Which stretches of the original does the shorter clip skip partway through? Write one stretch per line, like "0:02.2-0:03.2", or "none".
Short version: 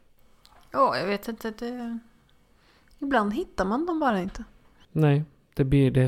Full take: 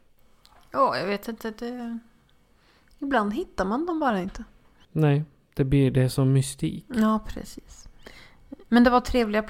none